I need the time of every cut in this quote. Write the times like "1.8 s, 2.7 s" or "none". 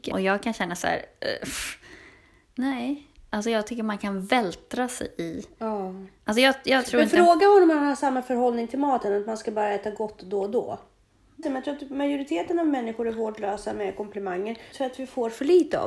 11.4 s, 14.7 s